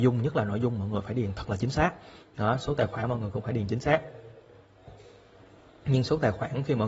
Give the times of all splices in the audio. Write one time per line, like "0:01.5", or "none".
none